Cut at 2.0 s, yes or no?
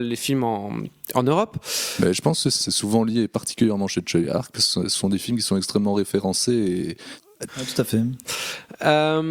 no